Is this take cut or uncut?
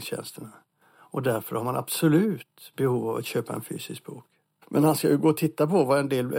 cut